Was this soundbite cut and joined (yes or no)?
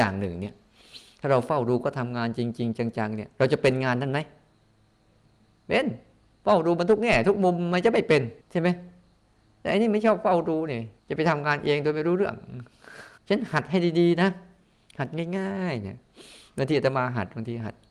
yes